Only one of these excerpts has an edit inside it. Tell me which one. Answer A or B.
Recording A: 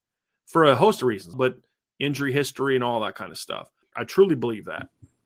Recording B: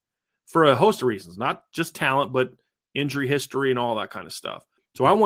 A